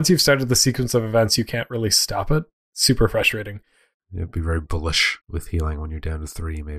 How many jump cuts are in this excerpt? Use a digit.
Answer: 2